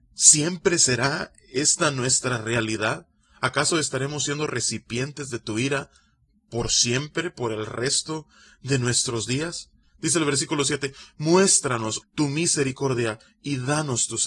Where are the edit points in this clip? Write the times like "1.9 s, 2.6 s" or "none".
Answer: 9.8 s, 12.0 s

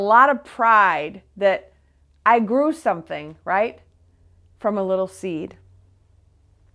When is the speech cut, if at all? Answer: none

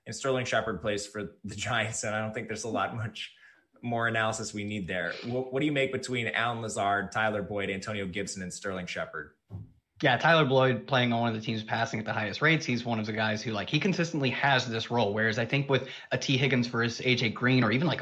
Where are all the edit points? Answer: none

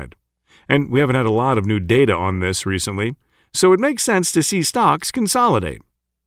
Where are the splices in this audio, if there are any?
none

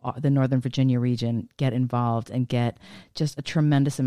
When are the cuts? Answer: none

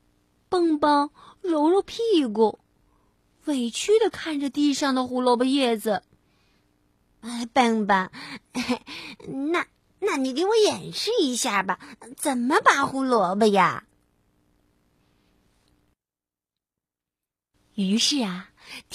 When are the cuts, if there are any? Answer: 15.7 s

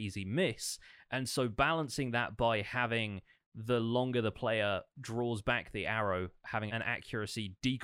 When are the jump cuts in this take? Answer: 6.7 s

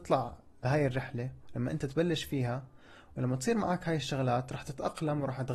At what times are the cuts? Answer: none

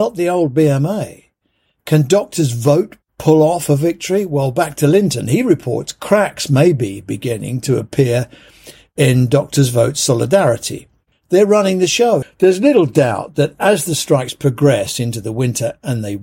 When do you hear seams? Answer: 11.1 s, 12.2 s

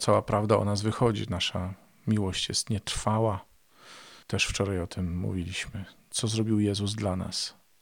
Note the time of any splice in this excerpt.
4.2 s

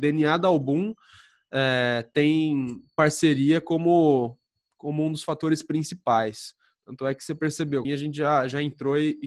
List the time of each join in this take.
7.8 s

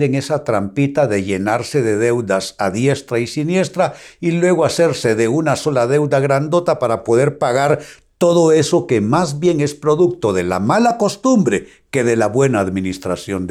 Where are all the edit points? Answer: none

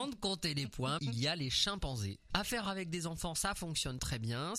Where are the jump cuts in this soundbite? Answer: 1.0 s, 2.3 s

